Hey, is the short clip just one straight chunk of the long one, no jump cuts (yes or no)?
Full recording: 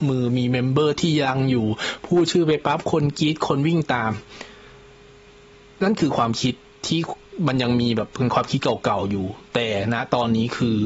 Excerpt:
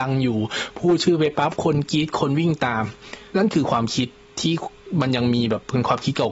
no